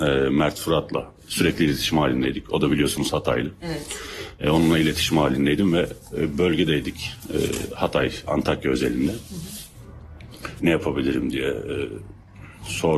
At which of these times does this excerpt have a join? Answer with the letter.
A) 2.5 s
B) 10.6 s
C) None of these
B